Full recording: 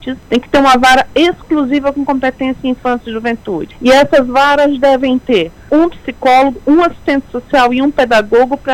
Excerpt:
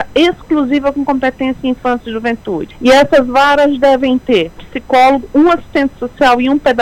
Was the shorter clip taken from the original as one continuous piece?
no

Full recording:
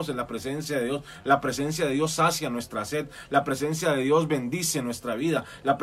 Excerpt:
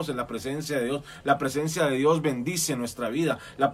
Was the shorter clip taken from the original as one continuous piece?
no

